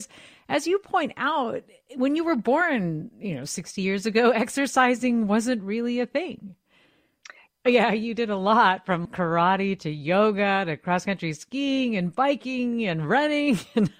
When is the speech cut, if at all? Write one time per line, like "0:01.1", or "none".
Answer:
0:07.5
0:09.1